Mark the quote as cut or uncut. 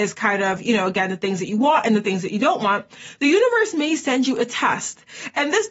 uncut